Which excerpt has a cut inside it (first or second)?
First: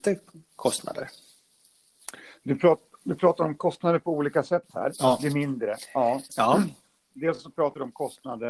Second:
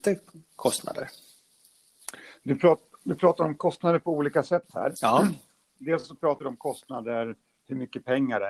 first